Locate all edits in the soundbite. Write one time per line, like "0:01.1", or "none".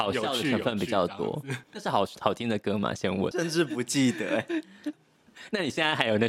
0:01.6
0:03.3
0:04.9